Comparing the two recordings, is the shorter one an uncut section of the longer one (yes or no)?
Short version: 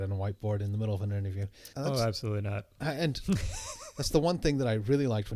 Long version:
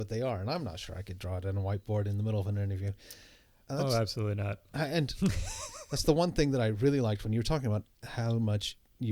no